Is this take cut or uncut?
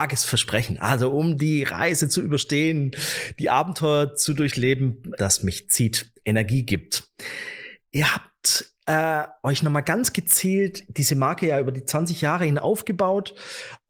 cut